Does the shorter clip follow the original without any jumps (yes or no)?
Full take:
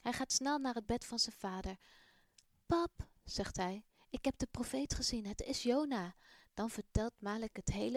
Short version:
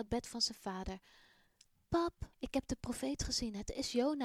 no